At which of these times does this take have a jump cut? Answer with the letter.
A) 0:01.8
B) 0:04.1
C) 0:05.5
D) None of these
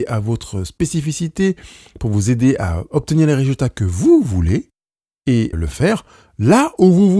C